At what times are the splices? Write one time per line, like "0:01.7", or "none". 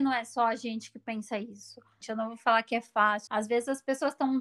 0:02.0
0:03.3